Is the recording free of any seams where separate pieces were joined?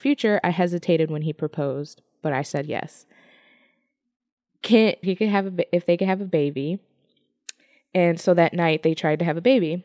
no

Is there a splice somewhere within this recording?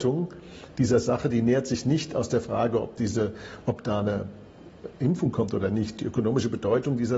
no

